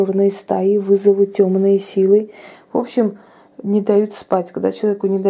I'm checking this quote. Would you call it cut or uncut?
cut